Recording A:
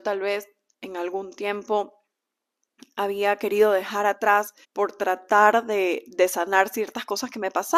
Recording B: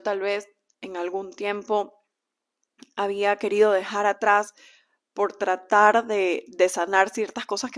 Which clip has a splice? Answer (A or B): A